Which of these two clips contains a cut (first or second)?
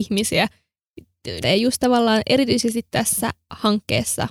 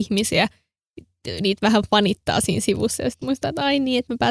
first